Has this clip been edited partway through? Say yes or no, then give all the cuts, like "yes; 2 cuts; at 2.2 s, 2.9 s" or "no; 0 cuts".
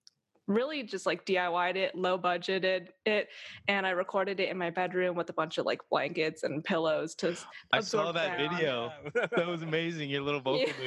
no; 0 cuts